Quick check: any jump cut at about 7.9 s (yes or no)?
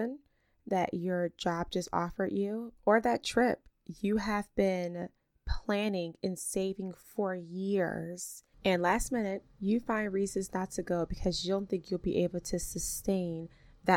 no